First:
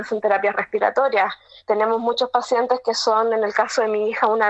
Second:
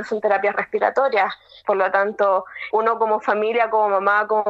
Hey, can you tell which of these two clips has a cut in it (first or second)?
second